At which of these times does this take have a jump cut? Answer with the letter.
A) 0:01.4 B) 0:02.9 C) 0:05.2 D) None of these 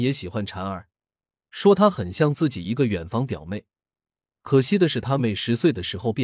C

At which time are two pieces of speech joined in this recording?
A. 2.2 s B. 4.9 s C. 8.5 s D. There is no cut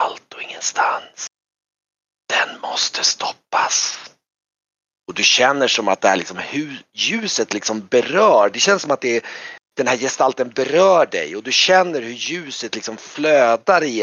B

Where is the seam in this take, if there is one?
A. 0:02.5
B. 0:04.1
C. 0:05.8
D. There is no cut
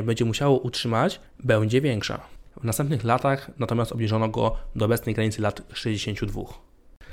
A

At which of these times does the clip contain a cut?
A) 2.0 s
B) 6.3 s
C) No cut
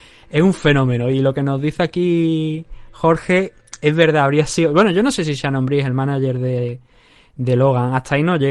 C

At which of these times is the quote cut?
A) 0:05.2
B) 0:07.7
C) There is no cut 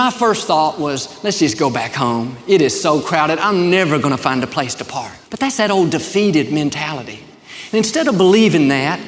A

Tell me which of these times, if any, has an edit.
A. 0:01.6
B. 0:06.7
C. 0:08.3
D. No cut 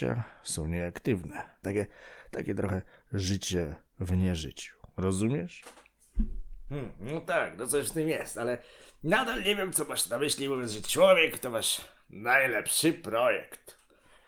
A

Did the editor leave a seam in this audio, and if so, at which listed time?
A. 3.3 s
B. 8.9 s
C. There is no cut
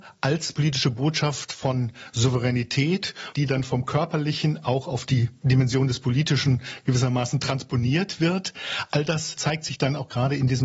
A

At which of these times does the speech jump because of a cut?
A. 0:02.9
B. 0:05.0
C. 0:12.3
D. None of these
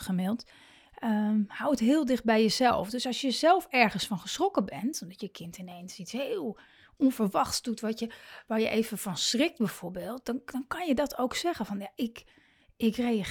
D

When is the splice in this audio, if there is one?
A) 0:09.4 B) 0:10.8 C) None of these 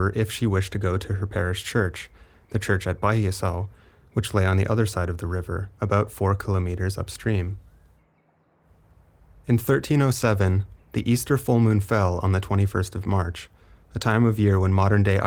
B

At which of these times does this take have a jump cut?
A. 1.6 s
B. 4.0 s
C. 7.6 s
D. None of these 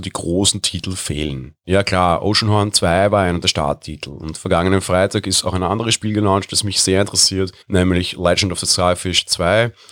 C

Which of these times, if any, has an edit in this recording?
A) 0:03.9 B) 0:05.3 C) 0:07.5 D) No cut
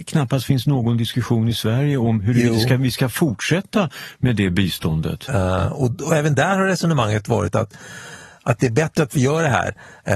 B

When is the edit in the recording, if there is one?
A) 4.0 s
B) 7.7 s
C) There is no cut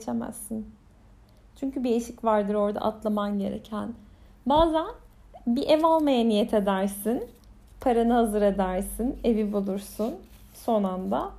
C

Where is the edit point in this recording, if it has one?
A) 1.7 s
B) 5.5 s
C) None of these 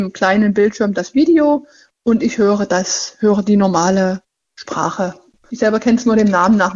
B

